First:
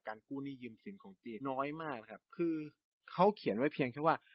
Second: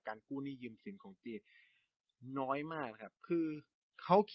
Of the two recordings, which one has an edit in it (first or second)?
first